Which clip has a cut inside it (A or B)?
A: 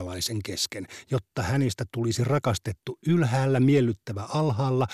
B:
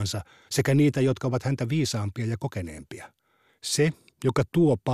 B